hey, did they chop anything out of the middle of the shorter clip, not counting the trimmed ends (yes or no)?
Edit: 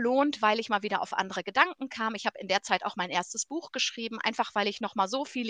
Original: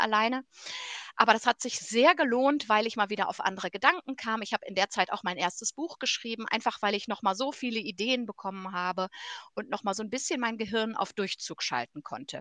no